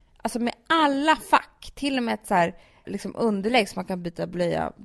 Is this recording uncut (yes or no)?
no